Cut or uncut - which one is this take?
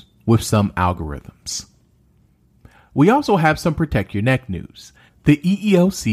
cut